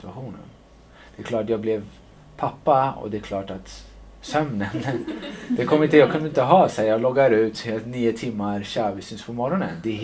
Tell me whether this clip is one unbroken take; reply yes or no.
yes